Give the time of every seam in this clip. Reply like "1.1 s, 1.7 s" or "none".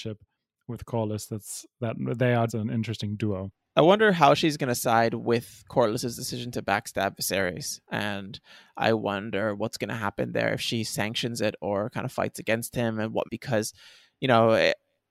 2.5 s, 13.2 s

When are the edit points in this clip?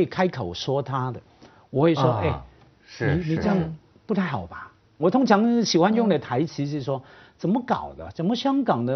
5.0 s

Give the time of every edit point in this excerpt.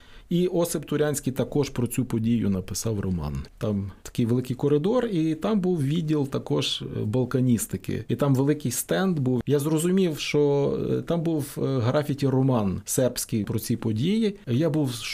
3.5 s

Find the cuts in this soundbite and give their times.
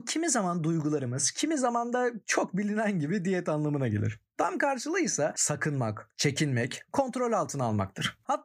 1.3 s

